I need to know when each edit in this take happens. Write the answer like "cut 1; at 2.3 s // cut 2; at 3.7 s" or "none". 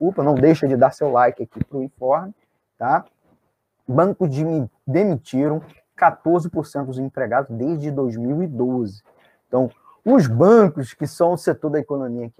none